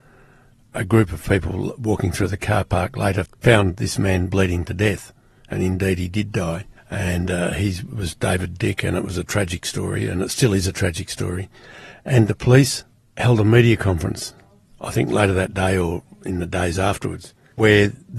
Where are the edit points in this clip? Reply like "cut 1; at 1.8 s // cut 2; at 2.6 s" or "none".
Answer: none